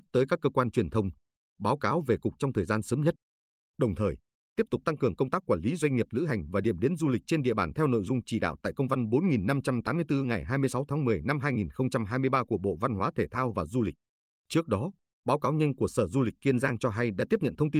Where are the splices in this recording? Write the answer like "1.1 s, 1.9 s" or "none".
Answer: none